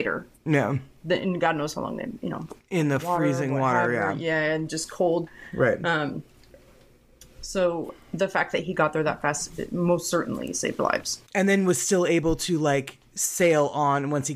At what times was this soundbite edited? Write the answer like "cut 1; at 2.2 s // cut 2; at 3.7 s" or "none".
cut 1; at 11.3 s